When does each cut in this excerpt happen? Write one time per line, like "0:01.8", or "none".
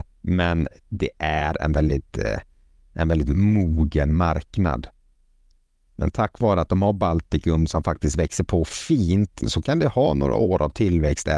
0:09.4